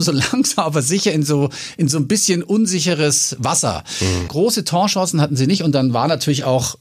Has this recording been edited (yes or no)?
yes